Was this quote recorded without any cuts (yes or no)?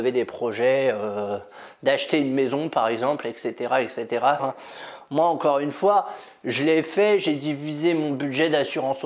no